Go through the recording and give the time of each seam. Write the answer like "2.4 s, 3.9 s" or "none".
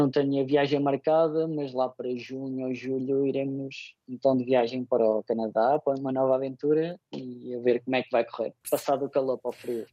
none